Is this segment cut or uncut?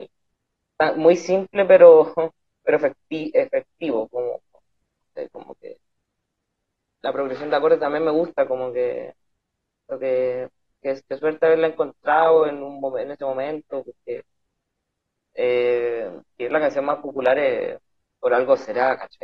uncut